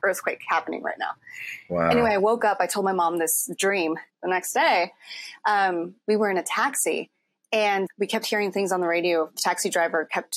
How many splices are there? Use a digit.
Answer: 2